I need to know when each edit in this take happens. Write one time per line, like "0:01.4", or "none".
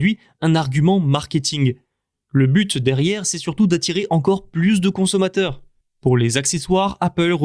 0:05.8